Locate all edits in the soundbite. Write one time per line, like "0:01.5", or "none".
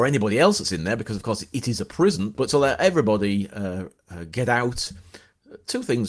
0:02.3